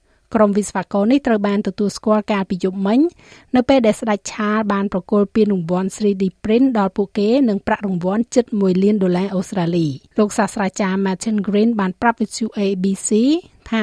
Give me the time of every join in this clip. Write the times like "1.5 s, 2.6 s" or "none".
10.1 s